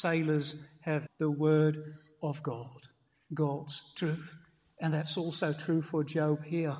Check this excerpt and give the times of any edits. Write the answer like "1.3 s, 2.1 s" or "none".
1.1 s

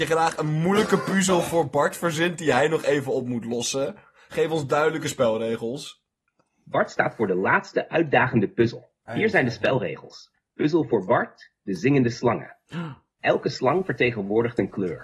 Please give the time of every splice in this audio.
13.2 s

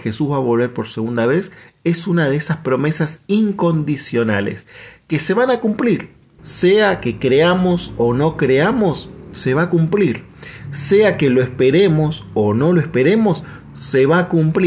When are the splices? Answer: 6.4 s

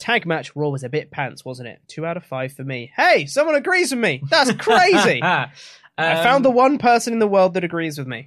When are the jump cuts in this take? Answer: none

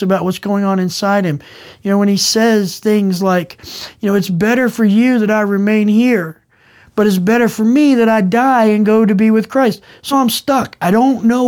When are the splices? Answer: 10.1 s

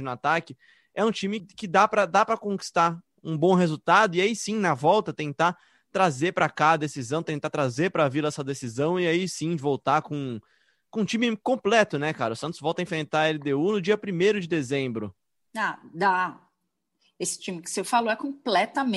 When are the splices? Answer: 1.4 s

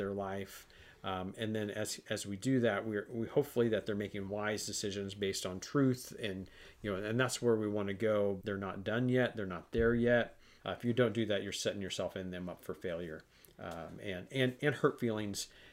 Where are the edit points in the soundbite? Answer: 8.4 s, 10.6 s

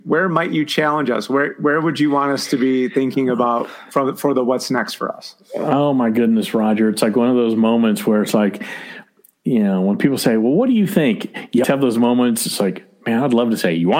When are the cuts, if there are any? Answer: 11.6 s

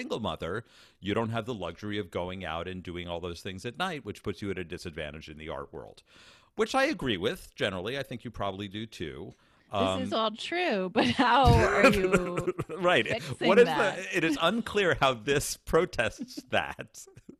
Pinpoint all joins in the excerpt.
none

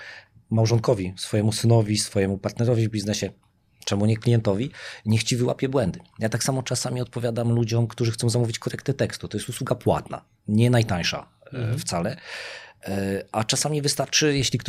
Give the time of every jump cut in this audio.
none

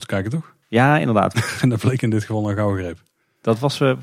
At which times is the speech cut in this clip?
1.3 s

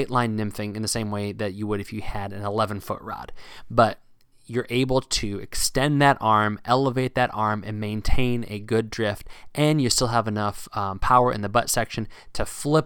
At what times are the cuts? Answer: none

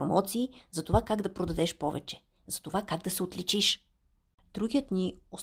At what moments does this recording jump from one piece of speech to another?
none

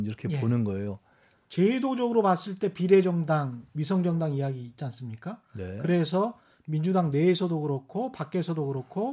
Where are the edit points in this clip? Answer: none

